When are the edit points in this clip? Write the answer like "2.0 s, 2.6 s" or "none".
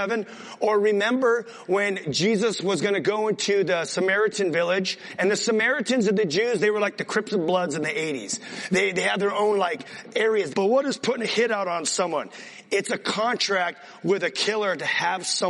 10.5 s

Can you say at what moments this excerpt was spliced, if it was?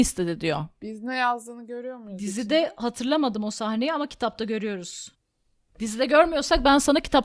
5.7 s

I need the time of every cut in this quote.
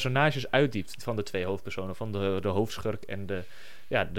none

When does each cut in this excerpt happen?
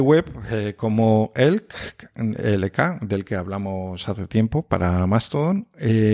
none

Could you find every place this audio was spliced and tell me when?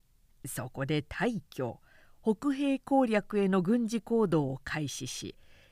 none

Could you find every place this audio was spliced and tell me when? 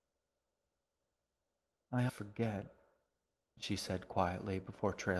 2.1 s

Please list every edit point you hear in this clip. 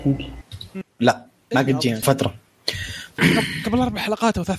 2.0 s, 3.2 s

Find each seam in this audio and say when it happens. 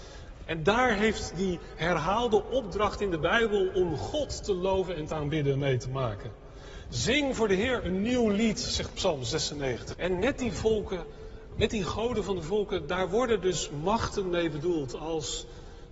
9.9 s

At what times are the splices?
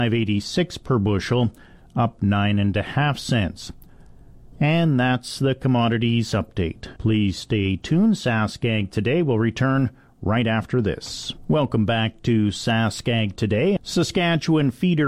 4.5 s, 7.0 s, 13.8 s

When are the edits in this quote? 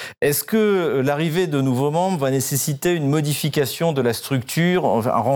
none

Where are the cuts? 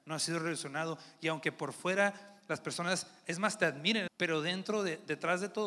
4.1 s

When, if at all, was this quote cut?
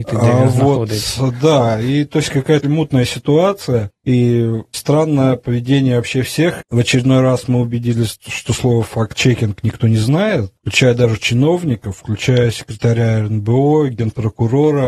2.6 s, 4.7 s, 6.6 s

